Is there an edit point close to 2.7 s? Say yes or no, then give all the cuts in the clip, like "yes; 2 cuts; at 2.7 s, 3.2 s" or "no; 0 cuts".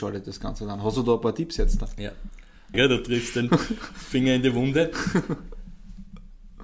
yes; 1 cut; at 2.7 s